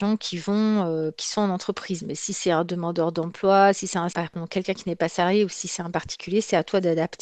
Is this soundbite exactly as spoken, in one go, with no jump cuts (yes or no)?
yes